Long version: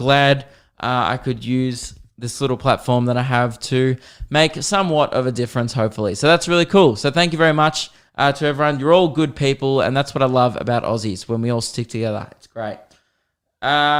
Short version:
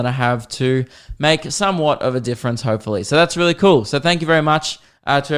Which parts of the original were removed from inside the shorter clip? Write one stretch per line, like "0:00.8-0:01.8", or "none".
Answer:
none